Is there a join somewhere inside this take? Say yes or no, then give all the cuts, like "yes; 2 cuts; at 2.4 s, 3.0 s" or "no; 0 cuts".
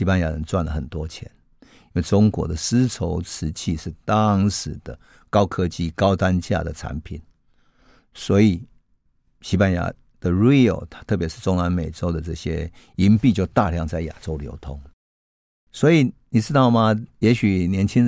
no; 0 cuts